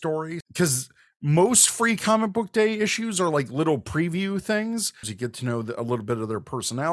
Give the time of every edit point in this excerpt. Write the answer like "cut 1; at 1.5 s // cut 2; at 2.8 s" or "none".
cut 1; at 5.0 s

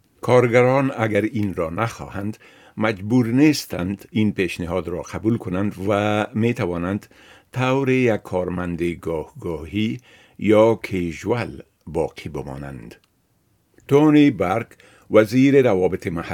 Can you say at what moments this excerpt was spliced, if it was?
cut 1; at 13.8 s

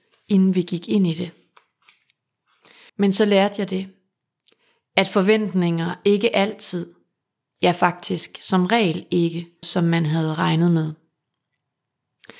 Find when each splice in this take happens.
cut 1; at 2.9 s // cut 2; at 9.6 s

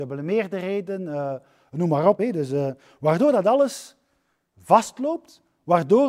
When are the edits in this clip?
none

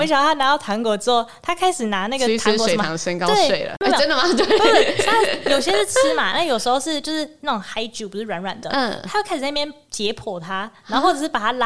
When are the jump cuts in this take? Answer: none

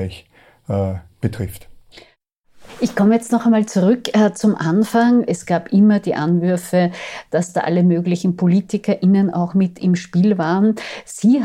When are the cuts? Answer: cut 1; at 5.3 s

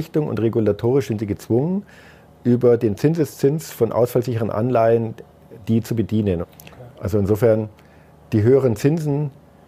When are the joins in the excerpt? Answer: cut 1; at 6.4 s

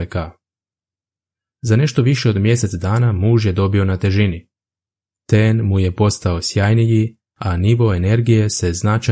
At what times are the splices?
none

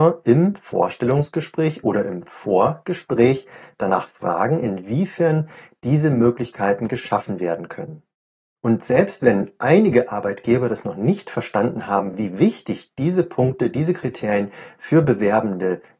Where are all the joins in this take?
none

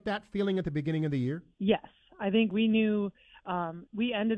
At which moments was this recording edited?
cut 1; at 1.5 s

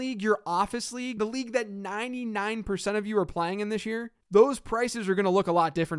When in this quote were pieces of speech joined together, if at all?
cut 1; at 1.2 s // cut 2; at 4.2 s

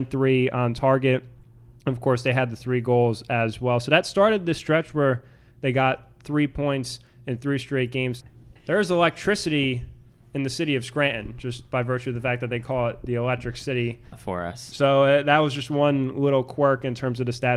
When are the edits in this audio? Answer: cut 1; at 8.2 s // cut 2; at 14.1 s

